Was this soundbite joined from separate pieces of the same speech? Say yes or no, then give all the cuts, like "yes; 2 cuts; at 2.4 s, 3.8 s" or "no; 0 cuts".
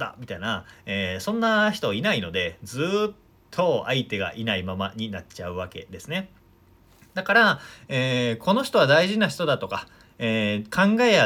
no; 0 cuts